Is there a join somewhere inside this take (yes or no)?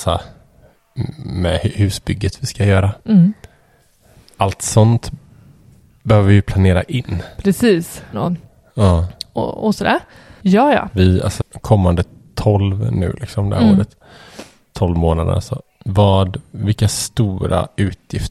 yes